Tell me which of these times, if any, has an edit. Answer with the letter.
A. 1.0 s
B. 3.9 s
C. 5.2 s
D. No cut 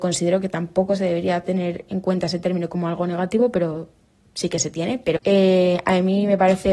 C